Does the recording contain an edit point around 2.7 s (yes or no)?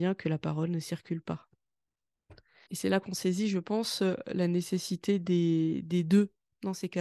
yes